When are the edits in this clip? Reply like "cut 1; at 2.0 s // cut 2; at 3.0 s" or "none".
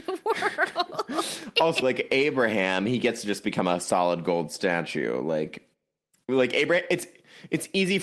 cut 1; at 1.8 s